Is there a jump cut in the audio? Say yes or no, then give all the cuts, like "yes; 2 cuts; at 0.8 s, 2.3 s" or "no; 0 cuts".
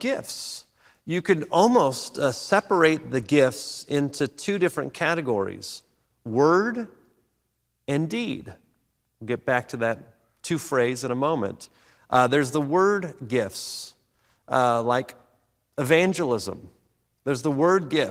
no; 0 cuts